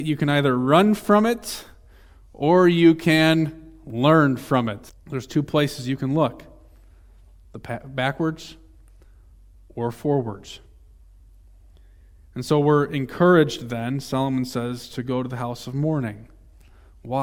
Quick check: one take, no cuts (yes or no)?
no